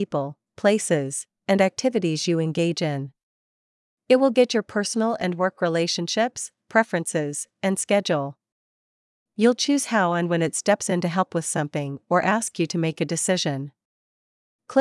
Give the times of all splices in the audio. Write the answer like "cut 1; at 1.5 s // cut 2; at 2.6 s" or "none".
cut 1; at 6.6 s